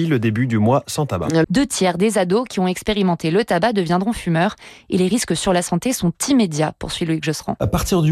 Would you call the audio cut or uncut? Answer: cut